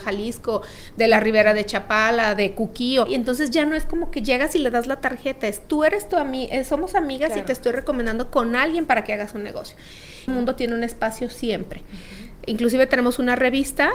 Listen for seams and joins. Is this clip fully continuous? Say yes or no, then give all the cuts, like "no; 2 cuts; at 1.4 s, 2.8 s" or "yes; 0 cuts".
no; 2 cuts; at 3.1 s, 10.3 s